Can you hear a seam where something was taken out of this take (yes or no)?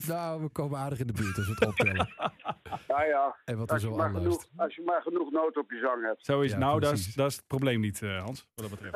no